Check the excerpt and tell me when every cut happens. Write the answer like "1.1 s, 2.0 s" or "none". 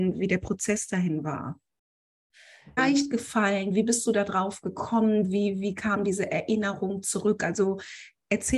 2.8 s